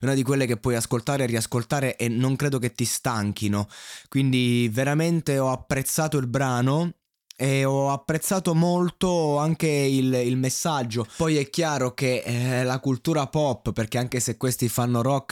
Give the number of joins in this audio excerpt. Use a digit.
0